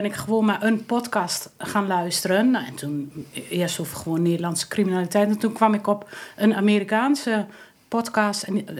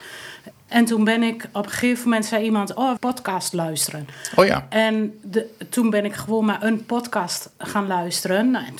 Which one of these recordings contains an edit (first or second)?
second